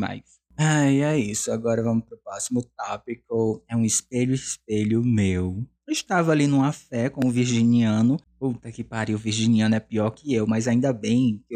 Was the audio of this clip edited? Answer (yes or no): yes